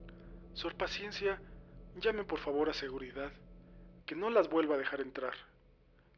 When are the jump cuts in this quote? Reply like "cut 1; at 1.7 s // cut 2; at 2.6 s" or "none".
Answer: cut 1; at 4.0 s